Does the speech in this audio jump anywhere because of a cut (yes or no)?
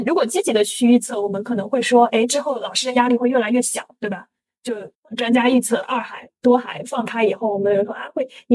yes